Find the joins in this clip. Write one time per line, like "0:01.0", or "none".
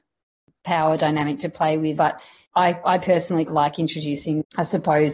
0:02.0
0:03.5